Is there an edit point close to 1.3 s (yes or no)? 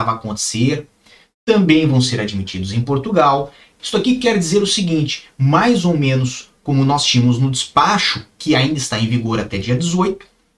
no